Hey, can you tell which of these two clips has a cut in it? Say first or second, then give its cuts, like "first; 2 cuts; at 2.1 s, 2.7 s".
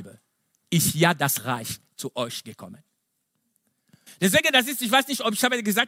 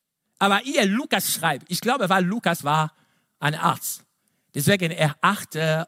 first; 1 cut; at 4.1 s